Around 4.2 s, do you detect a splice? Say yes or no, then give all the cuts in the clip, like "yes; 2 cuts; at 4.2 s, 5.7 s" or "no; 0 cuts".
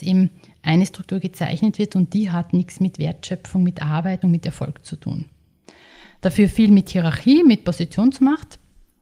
yes; 1 cut; at 4.2 s